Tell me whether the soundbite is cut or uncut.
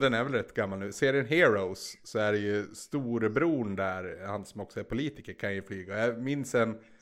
uncut